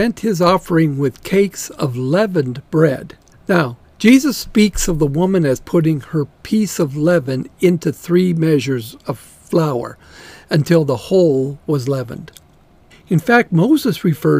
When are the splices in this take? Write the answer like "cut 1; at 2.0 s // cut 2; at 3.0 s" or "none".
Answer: cut 1; at 3.3 s // cut 2; at 12.9 s